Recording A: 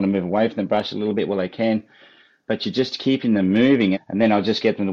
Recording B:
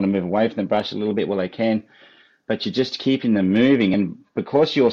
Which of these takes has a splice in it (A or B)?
A